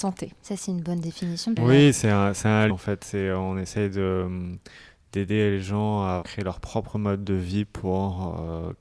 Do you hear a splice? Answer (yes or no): yes